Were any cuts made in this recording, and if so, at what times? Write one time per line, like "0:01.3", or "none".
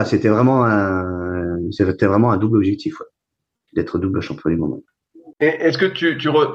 0:05.3